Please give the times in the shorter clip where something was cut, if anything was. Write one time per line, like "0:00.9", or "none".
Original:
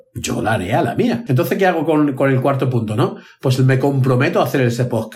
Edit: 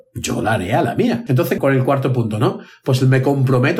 0:01.6